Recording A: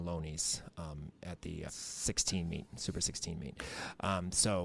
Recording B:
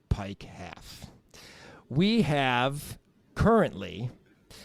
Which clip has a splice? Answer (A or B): A